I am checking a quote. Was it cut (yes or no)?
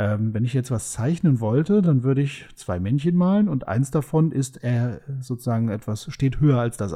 no